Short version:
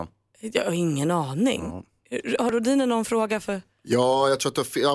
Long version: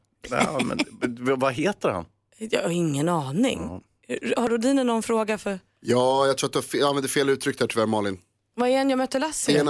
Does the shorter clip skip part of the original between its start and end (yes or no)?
no